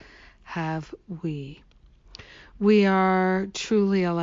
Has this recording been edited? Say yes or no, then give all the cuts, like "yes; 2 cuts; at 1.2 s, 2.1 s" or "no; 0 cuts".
no; 0 cuts